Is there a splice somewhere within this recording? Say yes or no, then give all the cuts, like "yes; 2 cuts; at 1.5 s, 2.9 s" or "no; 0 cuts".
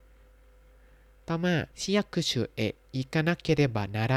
yes; 1 cut; at 1.7 s